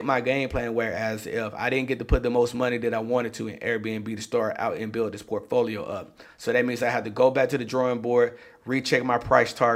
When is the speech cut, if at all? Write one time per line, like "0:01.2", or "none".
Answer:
none